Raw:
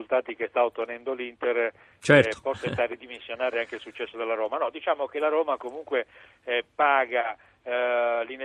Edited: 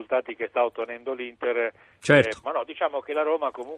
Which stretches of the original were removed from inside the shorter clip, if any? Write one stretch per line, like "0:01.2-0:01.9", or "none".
0:02.4-0:04.5